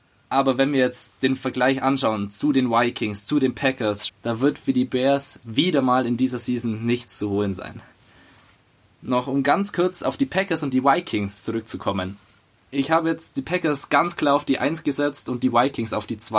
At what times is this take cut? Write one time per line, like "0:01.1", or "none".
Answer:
0:04.1